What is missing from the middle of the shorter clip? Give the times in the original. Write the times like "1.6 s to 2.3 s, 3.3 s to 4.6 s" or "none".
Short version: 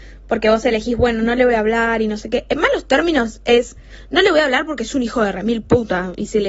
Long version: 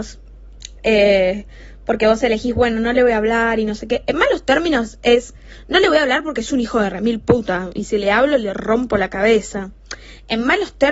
none